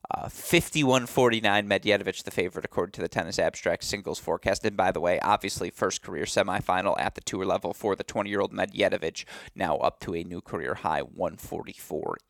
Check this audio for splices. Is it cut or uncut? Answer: uncut